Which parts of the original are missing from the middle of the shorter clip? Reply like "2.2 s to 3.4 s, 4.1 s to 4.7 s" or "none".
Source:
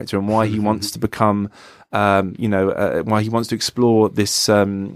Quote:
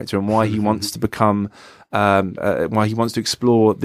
2.4 s to 2.7 s